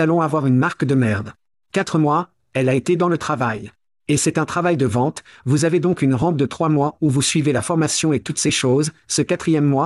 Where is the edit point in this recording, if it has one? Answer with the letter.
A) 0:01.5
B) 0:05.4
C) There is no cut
A